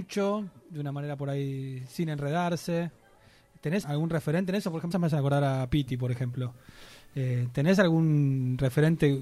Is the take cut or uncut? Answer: cut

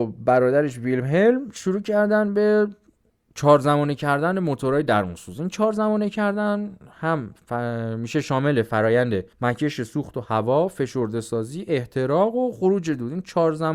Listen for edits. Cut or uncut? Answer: cut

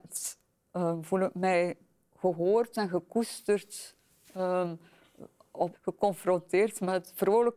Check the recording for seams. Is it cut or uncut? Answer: cut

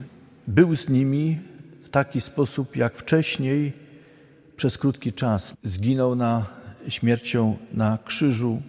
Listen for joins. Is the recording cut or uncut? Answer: cut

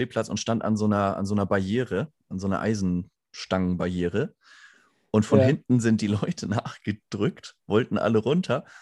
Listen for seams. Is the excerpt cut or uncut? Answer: uncut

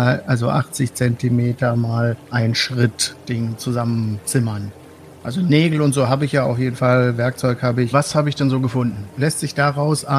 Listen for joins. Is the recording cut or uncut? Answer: cut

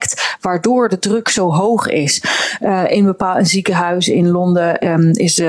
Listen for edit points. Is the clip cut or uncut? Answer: uncut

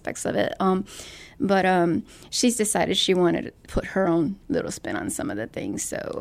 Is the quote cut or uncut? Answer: uncut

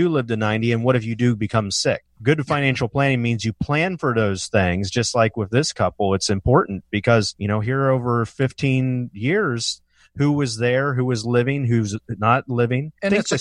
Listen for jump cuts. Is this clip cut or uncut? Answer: cut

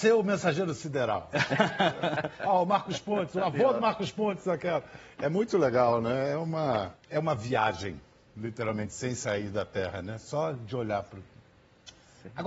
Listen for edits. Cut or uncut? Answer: uncut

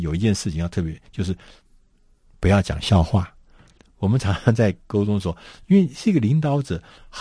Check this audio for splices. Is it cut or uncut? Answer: uncut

